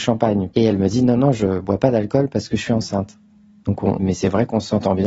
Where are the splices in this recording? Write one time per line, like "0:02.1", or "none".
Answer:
0:04.0